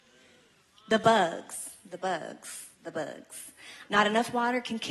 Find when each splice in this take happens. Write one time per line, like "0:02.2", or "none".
0:02.7
0:03.9